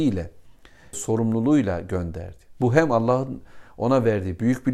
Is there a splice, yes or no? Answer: yes